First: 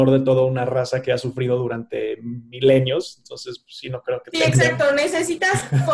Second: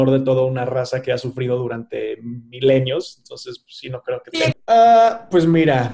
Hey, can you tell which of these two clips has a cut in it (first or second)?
second